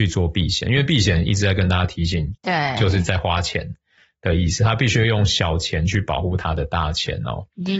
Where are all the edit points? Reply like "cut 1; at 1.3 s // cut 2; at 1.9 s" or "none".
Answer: cut 1; at 2.3 s

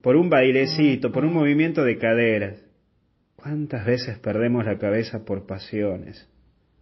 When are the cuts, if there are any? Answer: none

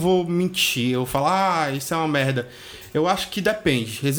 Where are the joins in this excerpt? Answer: none

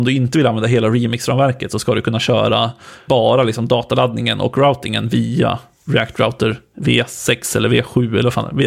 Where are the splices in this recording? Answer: cut 1; at 3.1 s

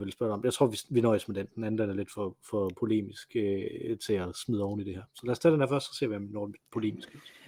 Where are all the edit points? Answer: none

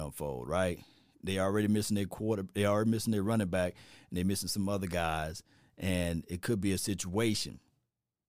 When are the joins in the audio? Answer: none

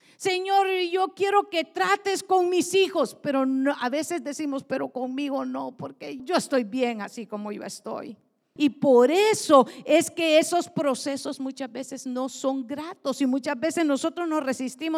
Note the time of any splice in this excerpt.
cut 1; at 6.2 s // cut 2; at 8.6 s

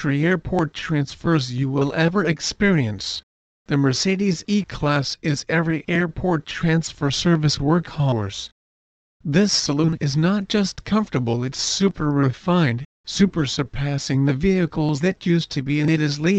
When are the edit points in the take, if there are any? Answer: cut 1; at 3.5 s

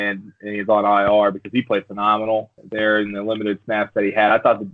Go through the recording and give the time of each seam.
cut 1; at 2.6 s

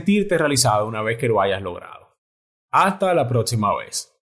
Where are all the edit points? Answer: cut 1; at 2.5 s

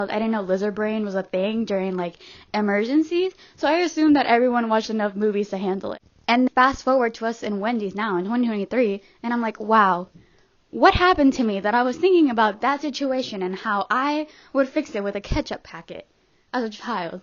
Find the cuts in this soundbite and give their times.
cut 1; at 6.5 s

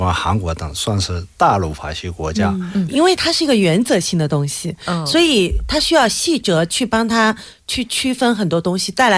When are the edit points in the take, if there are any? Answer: cut 1; at 2.9 s

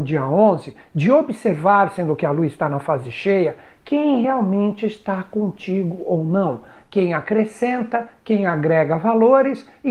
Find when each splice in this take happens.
none

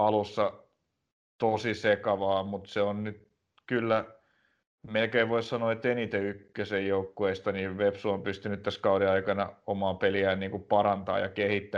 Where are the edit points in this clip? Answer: none

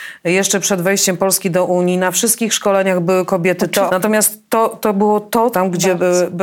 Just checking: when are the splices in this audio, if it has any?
cut 1; at 3.9 s // cut 2; at 5.5 s

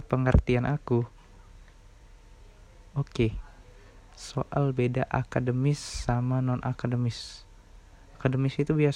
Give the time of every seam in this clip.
none

